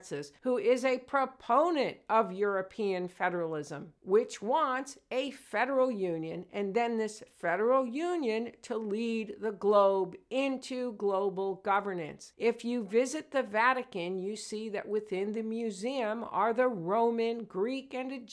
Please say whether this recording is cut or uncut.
uncut